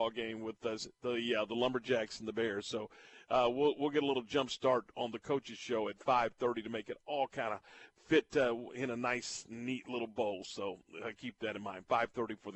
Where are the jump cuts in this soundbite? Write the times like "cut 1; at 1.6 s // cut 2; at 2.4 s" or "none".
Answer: none